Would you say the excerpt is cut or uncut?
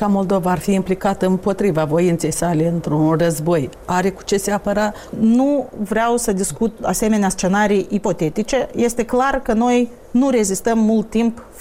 cut